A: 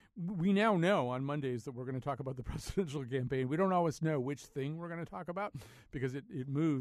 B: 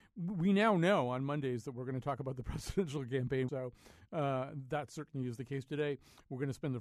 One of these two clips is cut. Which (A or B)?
B